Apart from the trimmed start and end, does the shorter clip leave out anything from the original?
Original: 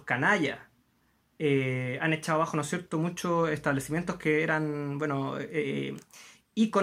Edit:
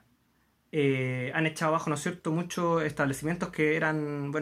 no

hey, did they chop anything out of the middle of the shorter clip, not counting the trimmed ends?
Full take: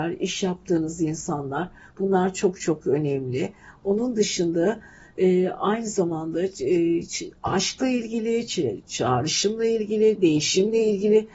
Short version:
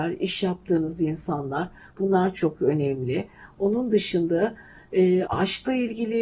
yes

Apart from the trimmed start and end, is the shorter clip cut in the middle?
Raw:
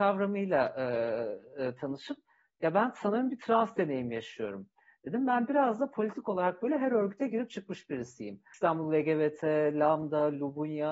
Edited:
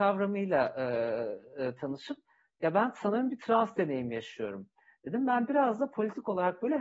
no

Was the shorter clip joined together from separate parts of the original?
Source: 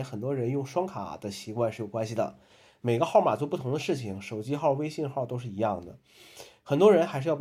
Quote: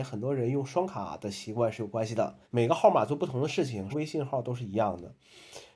yes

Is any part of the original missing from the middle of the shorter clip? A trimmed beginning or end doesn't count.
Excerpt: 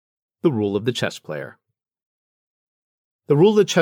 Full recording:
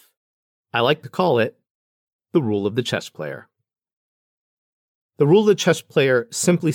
no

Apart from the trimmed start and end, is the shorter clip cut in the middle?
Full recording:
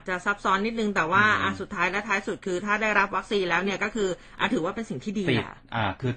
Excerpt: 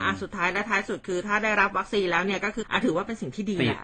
yes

